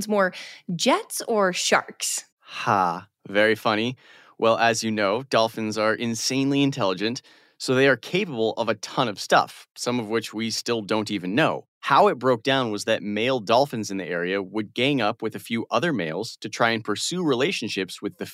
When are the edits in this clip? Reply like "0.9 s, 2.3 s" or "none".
none